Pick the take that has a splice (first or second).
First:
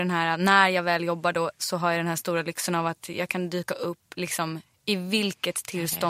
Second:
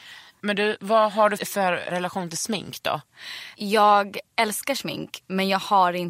second